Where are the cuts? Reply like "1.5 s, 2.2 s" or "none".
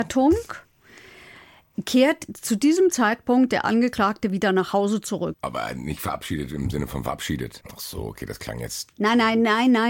5.3 s, 7.6 s

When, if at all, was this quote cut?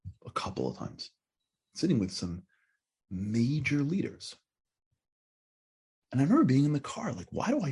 5.9 s

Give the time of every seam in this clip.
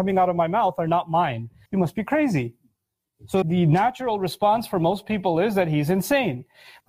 1.7 s, 3.4 s

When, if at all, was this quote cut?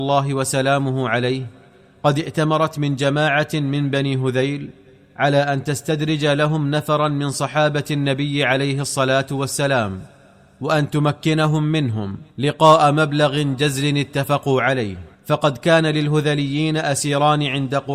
12.3 s, 15.1 s

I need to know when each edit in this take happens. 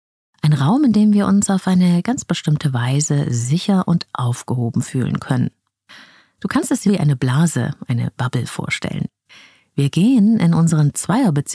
6.9 s

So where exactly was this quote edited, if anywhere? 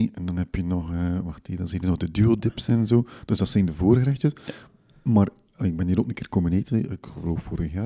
none

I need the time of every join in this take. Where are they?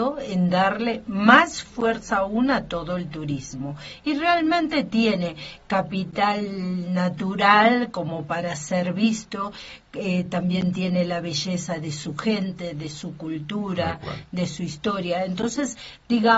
none

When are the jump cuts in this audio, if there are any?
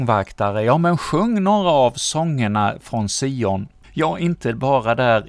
3.8 s

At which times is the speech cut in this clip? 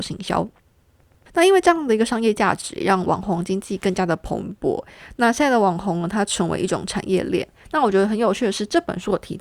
none

